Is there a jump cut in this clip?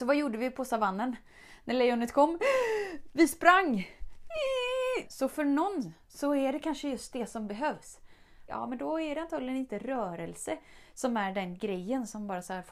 yes; 2 cuts; at 5.0 s, 8.5 s

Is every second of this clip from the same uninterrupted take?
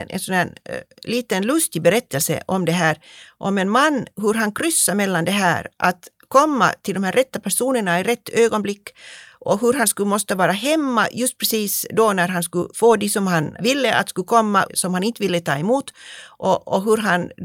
no; 1 cut; at 14.7 s

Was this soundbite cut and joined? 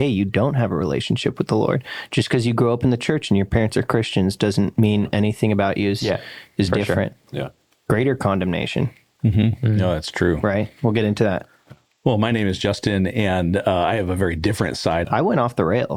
yes; 1 cut; at 15.0 s

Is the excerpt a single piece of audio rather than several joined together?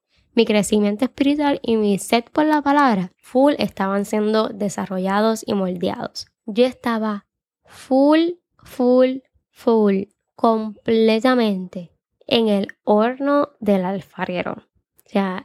yes; 0 cuts

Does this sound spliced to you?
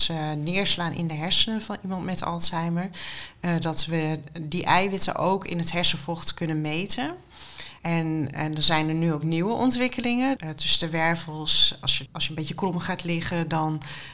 yes; 3 cuts; at 7.8 s, 10.4 s, 12.1 s

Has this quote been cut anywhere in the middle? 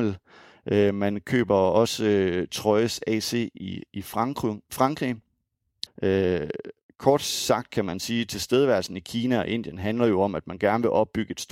yes; 1 cut; at 5.9 s

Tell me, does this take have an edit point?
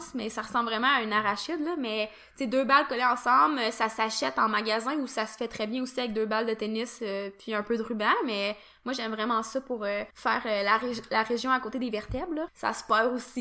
yes; 2 cuts; at 10.1 s, 12.5 s

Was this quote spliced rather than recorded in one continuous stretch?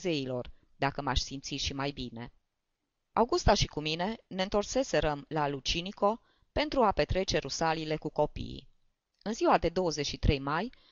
yes; 1 cut; at 3.1 s

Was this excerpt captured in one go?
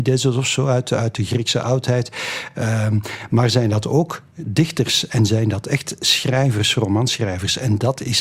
yes; 0 cuts

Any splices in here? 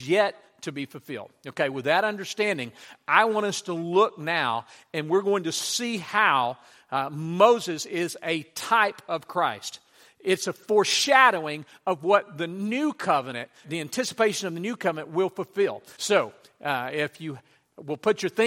yes; 2 cuts; at 13.6 s, 16.0 s

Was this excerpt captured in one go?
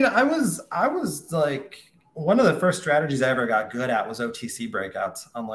yes; 0 cuts

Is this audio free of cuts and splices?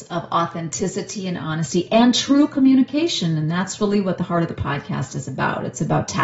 yes; 0 cuts

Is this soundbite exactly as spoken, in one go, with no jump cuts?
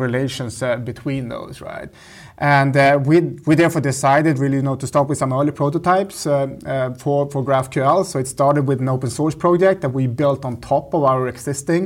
yes; 0 cuts

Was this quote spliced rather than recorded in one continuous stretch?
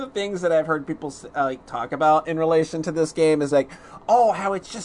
no; 0 cuts

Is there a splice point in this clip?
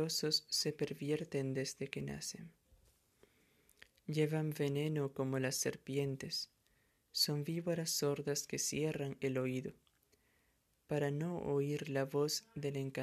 no; 0 cuts

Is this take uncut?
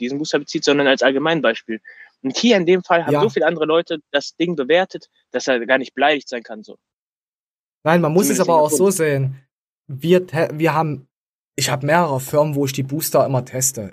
yes; 0 cuts

